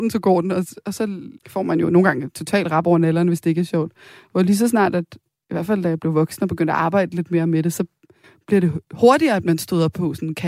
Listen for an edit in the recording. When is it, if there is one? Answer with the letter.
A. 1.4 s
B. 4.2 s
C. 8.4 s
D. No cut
A